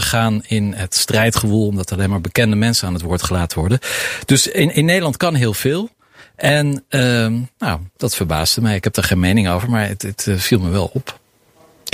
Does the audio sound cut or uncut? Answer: uncut